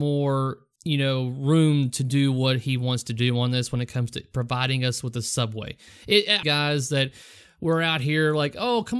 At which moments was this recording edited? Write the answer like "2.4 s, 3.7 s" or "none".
6.4 s